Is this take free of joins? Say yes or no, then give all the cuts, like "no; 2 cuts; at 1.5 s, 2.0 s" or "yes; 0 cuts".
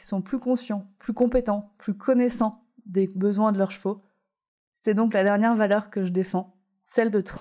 yes; 0 cuts